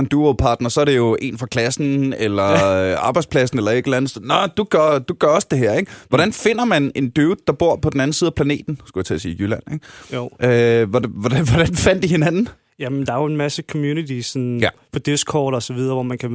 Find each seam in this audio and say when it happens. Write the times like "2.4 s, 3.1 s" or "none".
none

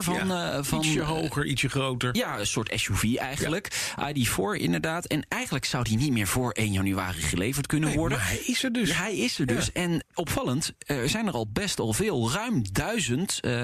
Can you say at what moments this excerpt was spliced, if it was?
none

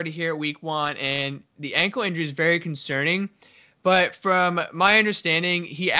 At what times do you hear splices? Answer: none

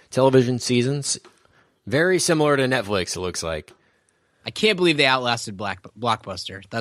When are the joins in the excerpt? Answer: none

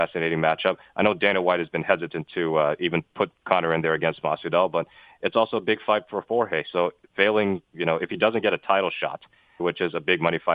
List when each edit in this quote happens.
9.6 s

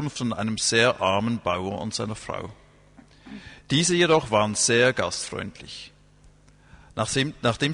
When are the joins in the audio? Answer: none

